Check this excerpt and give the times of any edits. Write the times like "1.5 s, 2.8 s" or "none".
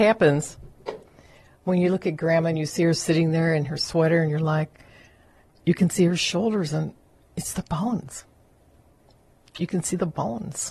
none